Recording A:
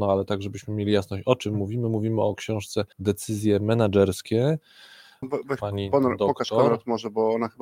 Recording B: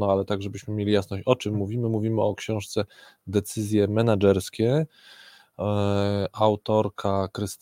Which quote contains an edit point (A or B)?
A